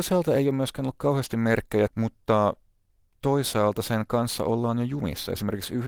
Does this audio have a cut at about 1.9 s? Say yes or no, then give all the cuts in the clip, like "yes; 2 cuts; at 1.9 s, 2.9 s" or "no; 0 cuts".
yes; 1 cut; at 1.9 s